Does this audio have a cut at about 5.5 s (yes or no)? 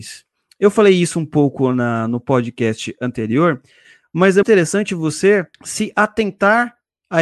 yes